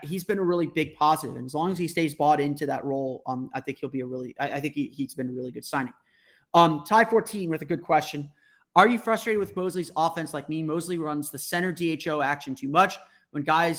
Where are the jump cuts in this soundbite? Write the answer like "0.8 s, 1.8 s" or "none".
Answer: none